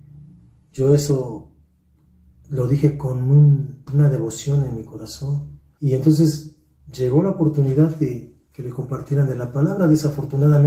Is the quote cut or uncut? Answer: cut